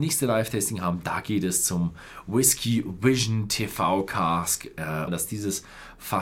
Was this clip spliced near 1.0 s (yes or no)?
no